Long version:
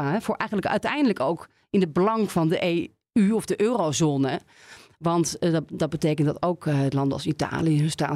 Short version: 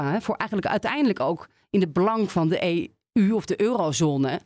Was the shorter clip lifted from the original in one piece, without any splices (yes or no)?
yes